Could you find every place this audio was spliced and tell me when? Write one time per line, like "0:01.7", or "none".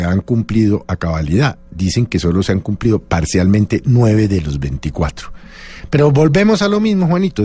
none